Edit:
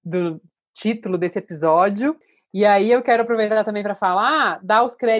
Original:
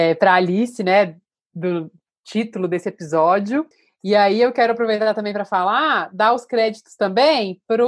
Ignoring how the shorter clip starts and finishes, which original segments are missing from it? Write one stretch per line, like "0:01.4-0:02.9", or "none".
none

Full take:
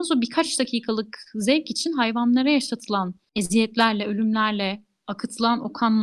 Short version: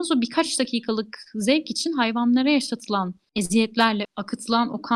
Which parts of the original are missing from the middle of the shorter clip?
0:04.0-0:05.0

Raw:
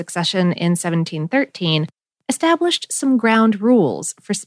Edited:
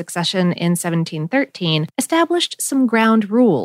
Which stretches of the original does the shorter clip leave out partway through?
0:01.9-0:02.2

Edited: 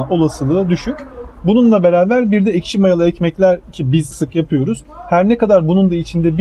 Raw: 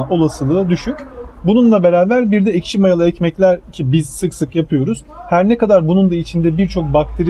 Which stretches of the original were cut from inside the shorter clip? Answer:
0:04.1-0:04.3

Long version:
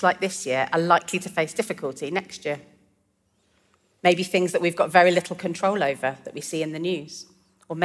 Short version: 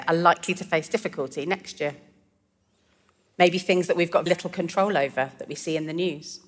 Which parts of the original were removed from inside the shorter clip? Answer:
0:04.9-0:05.1

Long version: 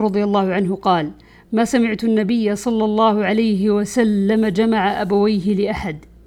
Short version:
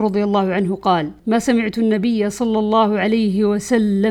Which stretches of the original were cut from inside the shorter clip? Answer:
0:01.2-0:01.4

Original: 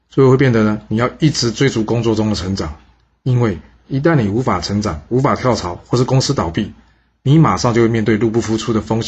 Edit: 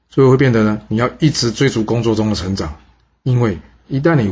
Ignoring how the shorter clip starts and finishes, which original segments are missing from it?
none

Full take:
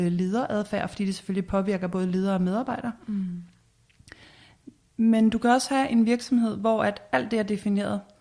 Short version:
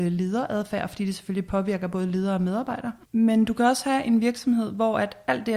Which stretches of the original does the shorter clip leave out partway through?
0:03.0-0:04.9

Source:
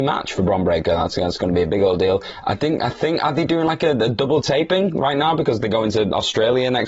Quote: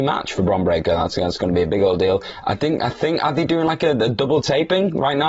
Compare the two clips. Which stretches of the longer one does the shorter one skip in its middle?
none

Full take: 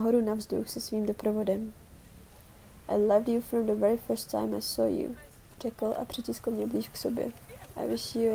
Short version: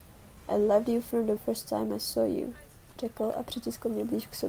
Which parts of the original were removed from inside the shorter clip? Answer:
0:03.8-0:04.0

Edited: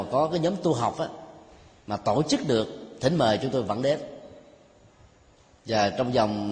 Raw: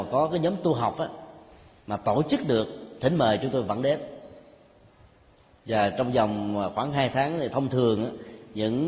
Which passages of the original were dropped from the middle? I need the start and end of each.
none

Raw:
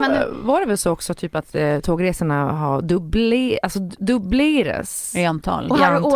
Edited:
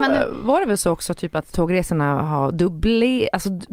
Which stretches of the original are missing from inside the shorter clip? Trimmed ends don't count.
0:01.5-0:01.8

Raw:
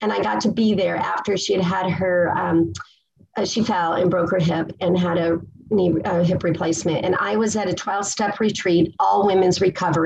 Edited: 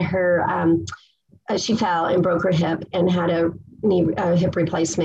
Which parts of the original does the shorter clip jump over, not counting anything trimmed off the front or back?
none

